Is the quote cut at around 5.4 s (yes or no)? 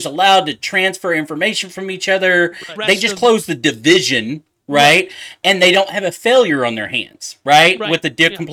no